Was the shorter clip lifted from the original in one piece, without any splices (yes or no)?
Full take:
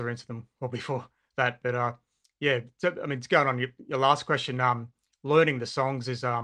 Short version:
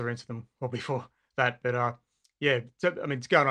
yes